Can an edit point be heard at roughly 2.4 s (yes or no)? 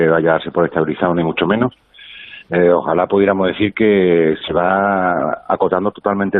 no